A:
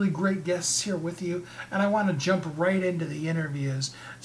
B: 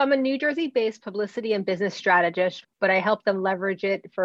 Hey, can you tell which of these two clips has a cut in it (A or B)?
B